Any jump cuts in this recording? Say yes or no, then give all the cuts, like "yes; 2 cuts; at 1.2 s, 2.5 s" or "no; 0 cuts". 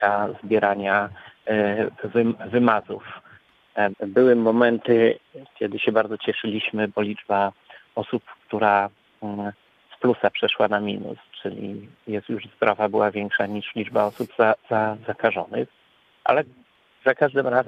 yes; 1 cut; at 3.9 s